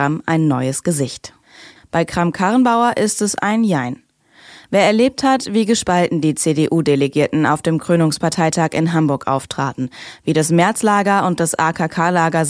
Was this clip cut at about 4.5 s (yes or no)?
no